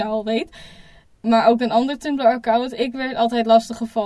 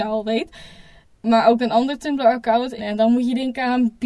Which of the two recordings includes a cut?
second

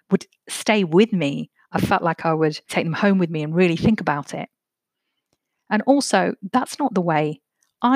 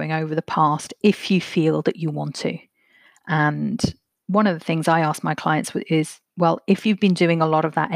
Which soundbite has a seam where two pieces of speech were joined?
first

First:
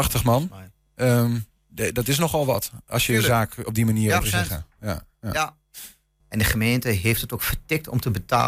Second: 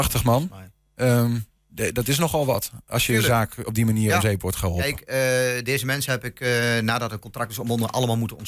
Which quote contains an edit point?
first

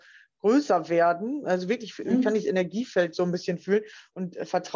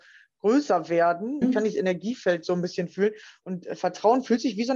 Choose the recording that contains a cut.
second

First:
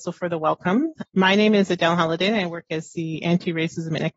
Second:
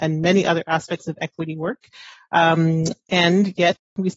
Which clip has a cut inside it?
first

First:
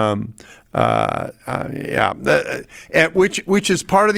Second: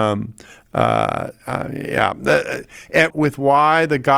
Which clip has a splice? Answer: second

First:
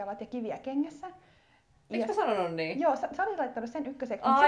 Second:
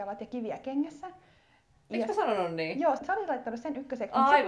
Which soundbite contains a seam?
second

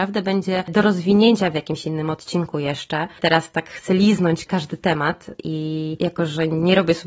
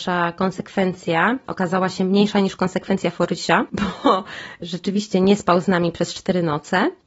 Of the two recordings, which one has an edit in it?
first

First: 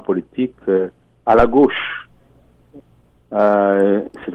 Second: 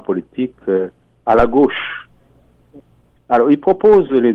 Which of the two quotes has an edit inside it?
second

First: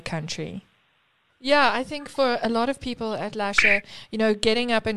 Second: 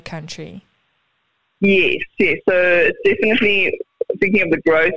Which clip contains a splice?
first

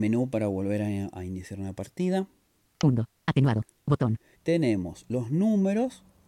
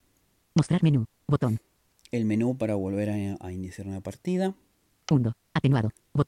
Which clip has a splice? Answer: first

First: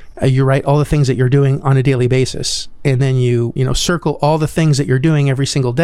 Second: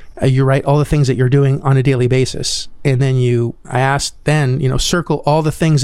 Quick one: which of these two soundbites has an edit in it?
first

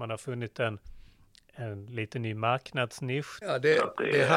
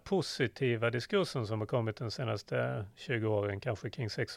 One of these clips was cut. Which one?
first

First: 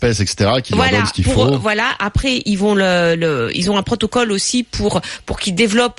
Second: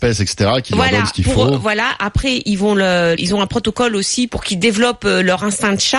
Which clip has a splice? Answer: second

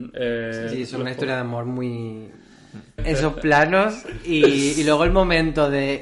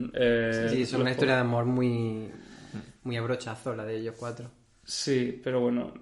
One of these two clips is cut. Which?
first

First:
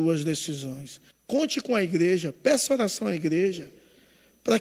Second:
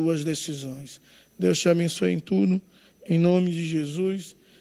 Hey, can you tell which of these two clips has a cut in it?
first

